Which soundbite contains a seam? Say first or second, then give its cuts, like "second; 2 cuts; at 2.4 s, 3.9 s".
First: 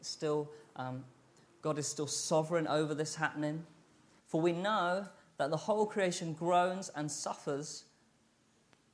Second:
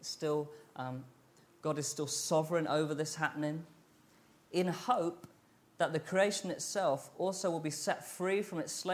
first; 1 cut; at 4.2 s